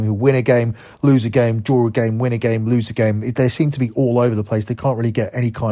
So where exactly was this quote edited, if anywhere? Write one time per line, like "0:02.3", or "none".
none